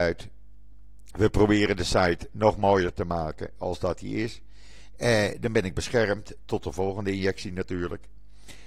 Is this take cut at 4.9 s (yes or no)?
yes